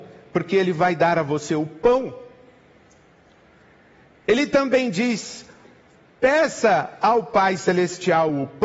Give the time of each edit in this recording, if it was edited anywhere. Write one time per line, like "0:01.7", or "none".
none